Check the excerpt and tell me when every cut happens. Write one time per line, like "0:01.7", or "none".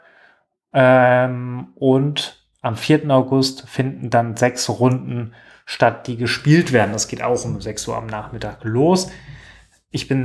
none